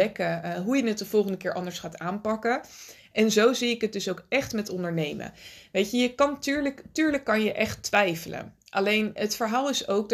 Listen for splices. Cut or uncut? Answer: uncut